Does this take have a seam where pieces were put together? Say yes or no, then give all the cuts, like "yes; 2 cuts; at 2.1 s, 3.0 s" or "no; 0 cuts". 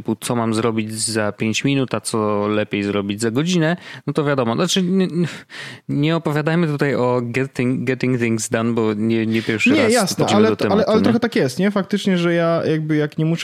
yes; 1 cut; at 10.3 s